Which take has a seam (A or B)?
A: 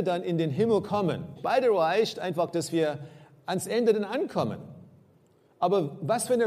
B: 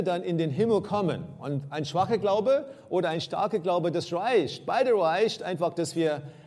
A